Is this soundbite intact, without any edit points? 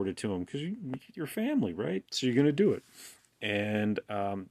no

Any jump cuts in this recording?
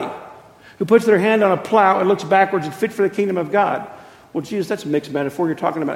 no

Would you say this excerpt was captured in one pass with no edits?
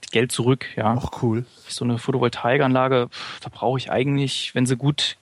no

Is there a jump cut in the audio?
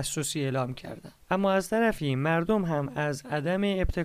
no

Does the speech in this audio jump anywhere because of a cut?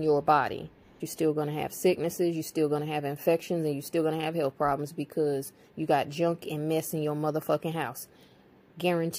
yes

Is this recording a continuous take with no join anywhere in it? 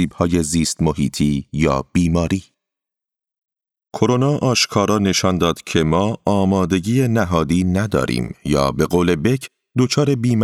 yes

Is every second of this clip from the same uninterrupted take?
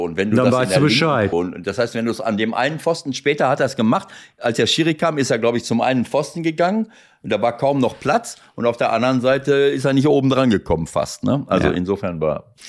no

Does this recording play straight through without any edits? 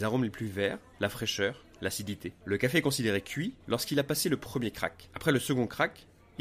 no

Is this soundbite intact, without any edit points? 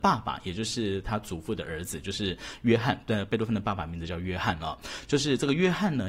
yes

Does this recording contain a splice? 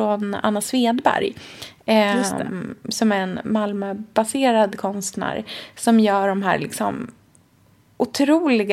no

